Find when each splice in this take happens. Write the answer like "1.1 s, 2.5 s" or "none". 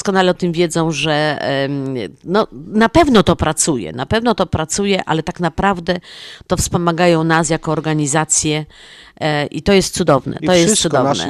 none